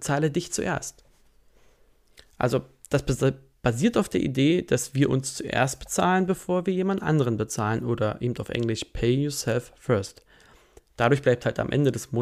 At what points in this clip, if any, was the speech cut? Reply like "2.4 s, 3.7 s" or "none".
none